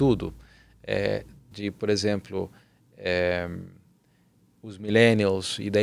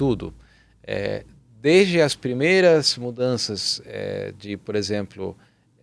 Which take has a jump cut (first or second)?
first